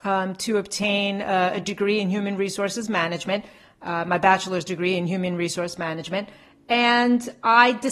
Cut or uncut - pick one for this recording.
uncut